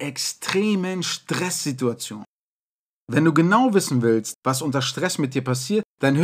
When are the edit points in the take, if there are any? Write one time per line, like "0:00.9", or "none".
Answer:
none